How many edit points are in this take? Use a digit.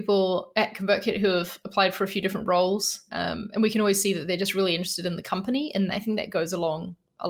1